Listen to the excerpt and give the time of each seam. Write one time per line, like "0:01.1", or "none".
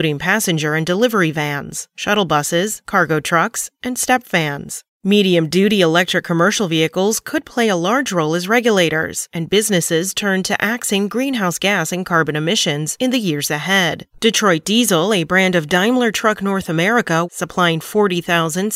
0:04.9
0:14.1
0:17.2

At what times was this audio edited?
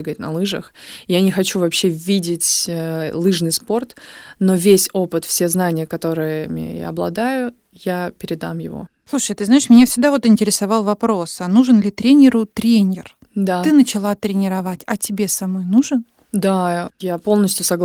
none

